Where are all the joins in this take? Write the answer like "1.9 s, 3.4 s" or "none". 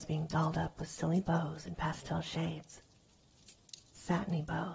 none